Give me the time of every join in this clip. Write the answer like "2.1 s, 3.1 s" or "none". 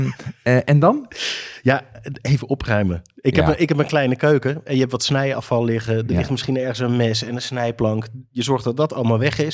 none